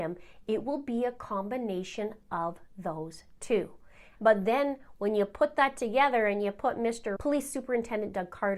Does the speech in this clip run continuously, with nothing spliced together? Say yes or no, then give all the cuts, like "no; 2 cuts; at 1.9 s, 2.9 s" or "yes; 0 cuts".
no; 2 cuts; at 4.2 s, 7.2 s